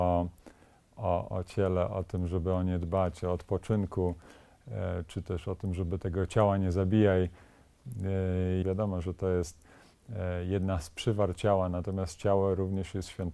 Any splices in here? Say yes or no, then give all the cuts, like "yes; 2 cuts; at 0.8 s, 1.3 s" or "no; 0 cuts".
yes; 2 cuts; at 1.3 s, 8.6 s